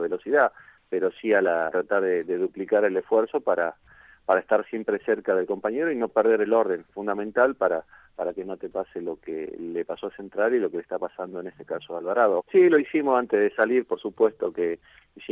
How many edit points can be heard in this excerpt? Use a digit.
2